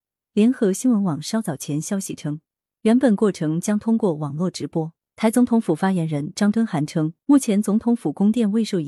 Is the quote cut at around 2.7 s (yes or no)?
yes